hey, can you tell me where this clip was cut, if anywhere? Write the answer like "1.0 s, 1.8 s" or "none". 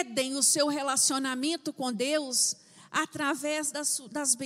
none